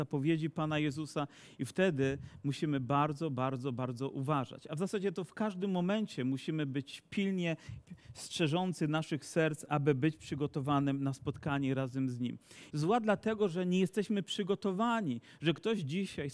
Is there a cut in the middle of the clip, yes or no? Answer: yes